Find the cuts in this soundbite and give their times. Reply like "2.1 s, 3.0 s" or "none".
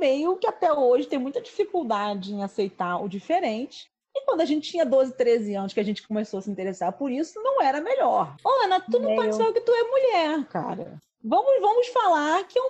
8.4 s